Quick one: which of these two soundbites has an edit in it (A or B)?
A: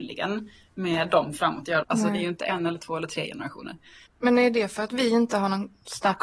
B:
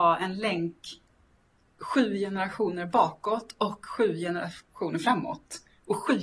A